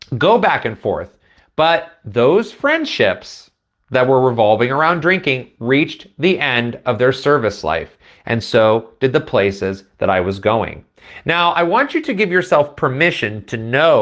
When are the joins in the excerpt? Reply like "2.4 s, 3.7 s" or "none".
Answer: none